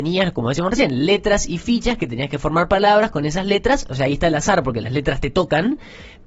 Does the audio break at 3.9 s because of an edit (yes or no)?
no